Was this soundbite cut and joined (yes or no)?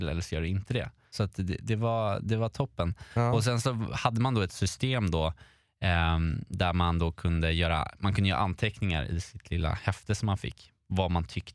no